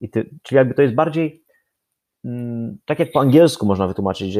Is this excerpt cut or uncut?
uncut